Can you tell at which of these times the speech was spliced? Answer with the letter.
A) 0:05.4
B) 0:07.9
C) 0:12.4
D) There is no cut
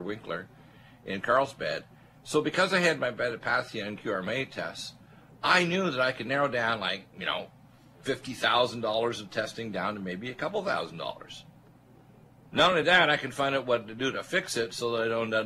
D